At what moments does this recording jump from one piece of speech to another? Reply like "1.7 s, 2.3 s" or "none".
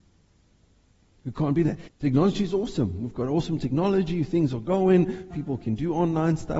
1.9 s, 5.3 s